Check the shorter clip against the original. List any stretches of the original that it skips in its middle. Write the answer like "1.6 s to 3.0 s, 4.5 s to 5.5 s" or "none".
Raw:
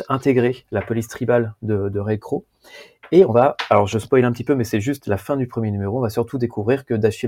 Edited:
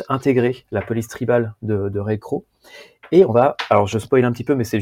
none